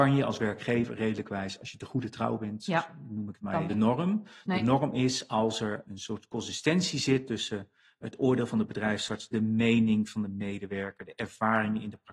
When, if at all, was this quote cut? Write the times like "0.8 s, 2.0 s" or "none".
3.7 s, 5.9 s